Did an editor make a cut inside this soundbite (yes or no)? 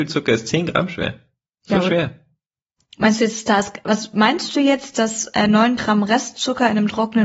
no